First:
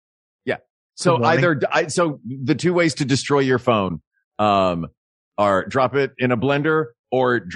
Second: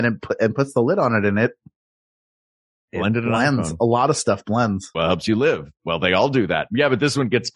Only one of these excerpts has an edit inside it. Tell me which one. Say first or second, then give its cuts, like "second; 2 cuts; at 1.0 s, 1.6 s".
second; 1 cut; at 4.9 s